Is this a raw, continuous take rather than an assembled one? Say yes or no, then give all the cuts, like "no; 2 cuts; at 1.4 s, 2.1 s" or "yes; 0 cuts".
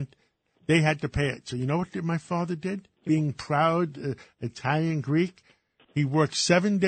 no; 1 cut; at 2.9 s